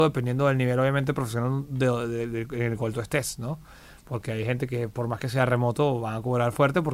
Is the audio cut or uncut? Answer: uncut